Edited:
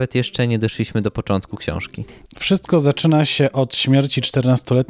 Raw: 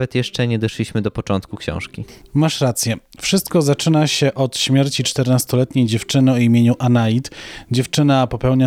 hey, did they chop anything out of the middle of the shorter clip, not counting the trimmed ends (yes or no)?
yes